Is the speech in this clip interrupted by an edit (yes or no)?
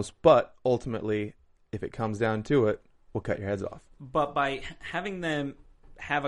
yes